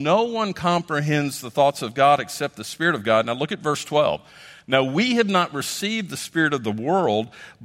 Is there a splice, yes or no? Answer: no